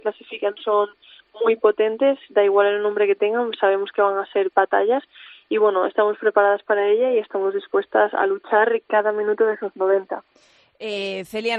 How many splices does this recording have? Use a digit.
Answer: 0